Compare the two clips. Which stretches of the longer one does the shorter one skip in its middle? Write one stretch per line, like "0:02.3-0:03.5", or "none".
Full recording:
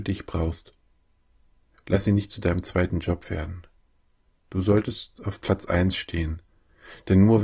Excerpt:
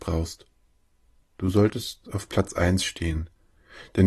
0:01.5-0:04.3

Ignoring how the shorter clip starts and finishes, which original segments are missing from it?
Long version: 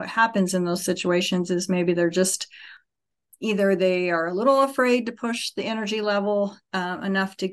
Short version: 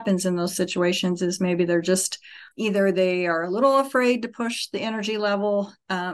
0:02.8-0:03.3

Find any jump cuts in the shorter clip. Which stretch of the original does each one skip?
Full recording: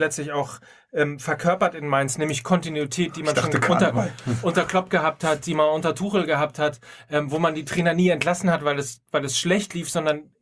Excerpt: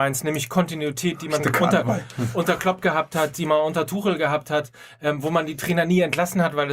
0:03.3-0:03.5

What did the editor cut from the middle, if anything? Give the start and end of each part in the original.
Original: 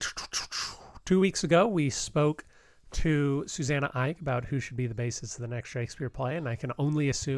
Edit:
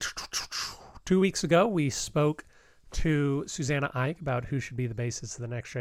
none

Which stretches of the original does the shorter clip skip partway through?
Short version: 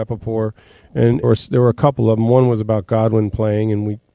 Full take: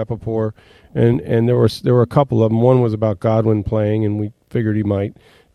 0:01.2-0:01.6

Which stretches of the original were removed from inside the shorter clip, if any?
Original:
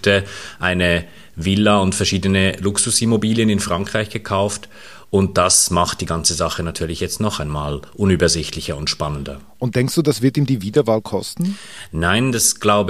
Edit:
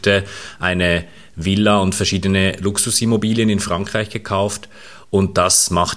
none

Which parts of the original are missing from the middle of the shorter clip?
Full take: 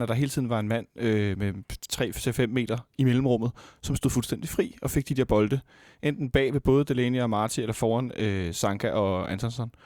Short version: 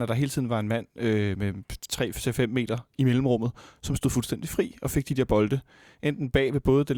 none

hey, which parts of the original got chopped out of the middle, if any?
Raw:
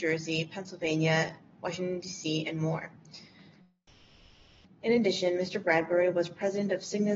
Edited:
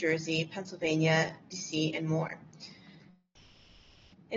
0:01.5-0:02.0

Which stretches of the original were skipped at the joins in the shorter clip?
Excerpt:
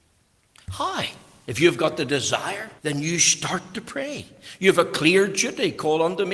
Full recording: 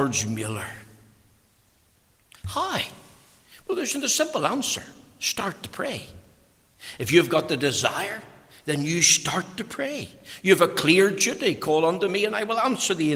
0:03.2-0:07.0
0:08.3-0:08.6

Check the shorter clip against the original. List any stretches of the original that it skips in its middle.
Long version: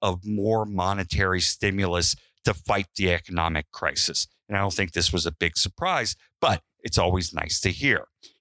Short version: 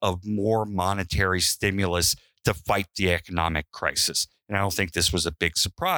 none

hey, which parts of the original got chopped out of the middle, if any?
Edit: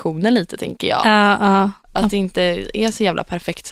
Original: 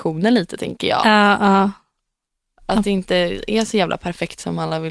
0:01.8-0:02.5

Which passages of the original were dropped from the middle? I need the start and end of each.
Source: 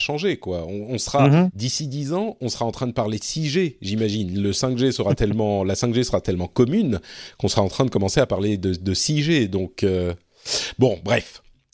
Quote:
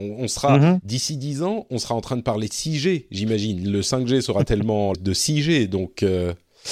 0:05.6-0:08.7

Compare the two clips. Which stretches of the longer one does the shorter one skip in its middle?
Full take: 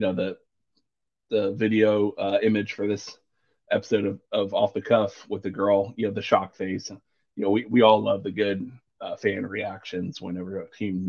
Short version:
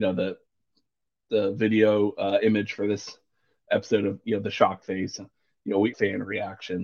0:04.2-0:05.9
0:07.6-0:09.2

